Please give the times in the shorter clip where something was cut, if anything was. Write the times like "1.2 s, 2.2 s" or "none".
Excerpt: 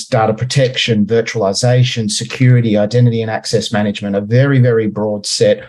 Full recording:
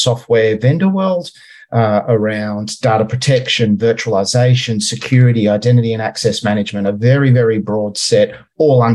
none

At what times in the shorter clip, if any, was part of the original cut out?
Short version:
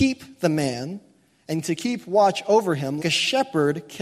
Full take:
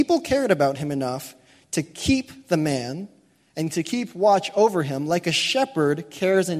3.0 s

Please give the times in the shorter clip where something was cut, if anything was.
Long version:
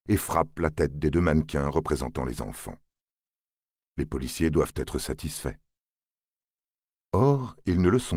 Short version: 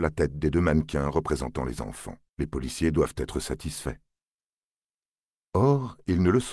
2.3 s

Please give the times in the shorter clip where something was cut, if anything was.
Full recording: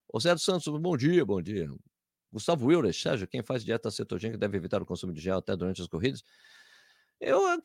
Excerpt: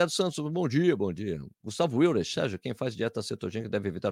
1.5 s

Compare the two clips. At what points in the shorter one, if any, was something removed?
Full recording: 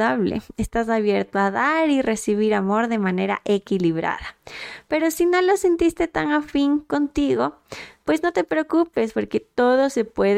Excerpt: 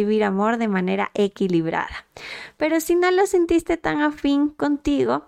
none

